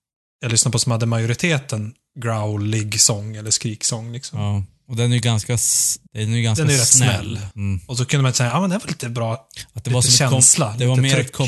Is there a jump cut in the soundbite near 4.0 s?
no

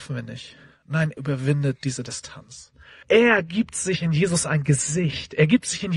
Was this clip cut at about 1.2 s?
yes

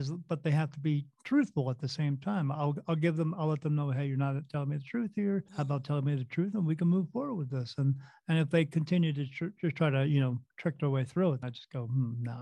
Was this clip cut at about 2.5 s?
no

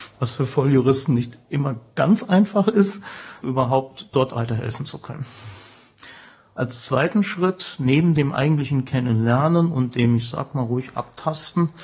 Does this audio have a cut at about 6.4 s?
no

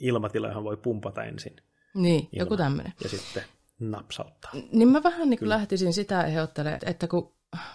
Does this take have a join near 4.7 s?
no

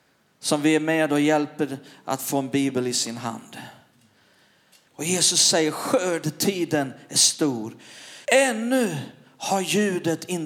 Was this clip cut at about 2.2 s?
no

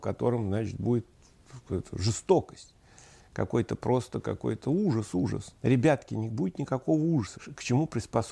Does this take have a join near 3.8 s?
no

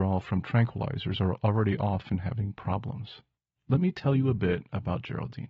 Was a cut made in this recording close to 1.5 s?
no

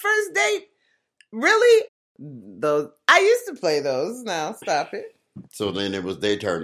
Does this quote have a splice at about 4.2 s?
no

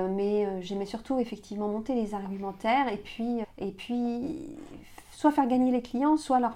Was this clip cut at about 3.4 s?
yes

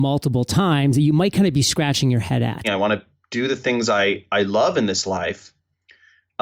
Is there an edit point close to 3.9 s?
no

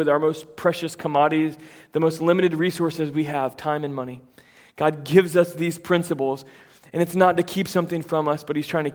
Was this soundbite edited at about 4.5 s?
no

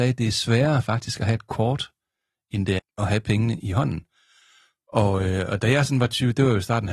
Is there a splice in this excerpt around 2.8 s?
yes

